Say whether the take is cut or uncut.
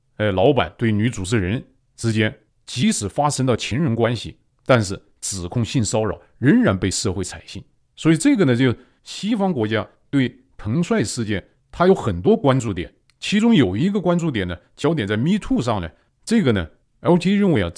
uncut